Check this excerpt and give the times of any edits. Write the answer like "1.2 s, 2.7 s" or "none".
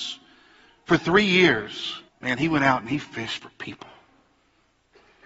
2.1 s